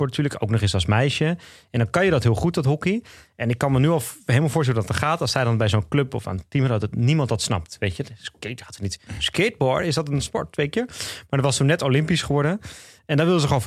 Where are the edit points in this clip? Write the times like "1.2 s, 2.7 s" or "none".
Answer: none